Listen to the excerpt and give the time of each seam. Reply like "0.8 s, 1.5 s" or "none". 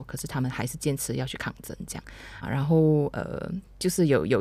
2.4 s

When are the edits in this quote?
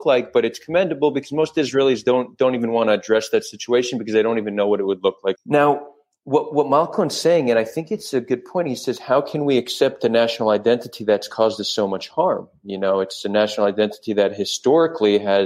5.4 s

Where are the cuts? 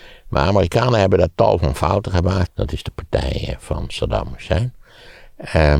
2.5 s

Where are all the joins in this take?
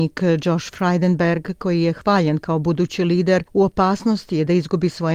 3.5 s

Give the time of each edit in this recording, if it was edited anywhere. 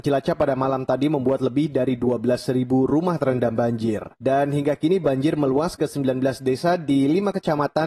4.1 s

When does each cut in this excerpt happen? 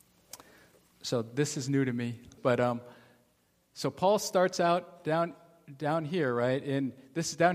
2.4 s

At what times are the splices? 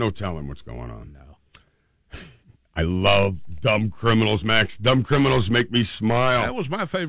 none

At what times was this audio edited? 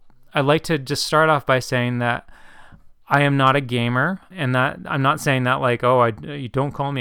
4.3 s

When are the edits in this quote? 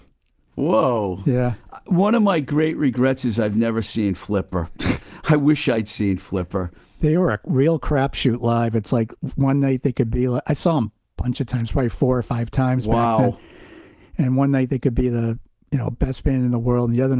none

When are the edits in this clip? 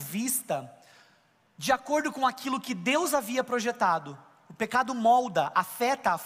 none

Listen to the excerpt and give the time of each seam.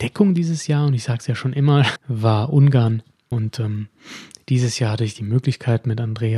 2.0 s, 3.3 s

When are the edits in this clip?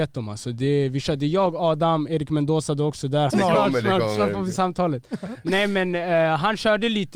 3.3 s

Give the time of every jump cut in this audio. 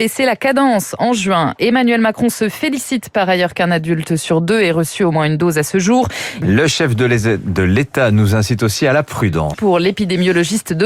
6.4 s, 9.5 s

